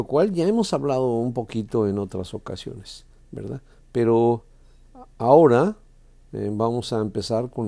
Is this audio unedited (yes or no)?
yes